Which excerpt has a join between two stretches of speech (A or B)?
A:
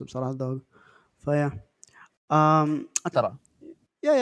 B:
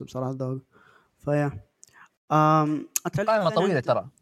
A